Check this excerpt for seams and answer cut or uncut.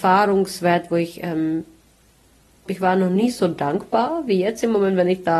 cut